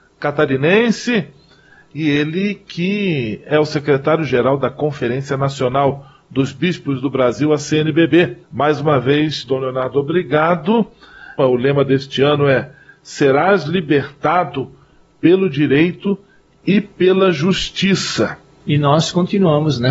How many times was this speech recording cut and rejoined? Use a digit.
3